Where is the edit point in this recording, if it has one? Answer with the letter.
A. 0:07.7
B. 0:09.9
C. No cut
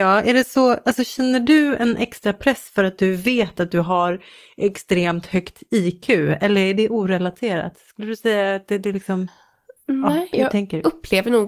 C